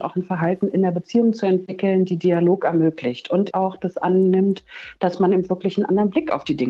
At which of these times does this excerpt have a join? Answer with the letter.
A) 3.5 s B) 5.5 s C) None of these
A